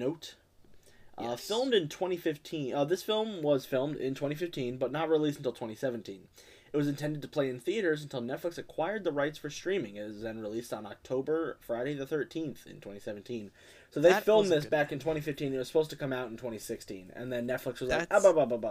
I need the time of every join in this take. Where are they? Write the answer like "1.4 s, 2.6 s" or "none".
none